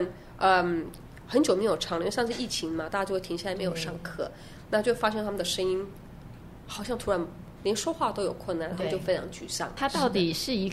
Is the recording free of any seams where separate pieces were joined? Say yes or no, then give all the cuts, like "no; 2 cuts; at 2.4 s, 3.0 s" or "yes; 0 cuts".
no; 2 cuts; at 8.7 s, 9.8 s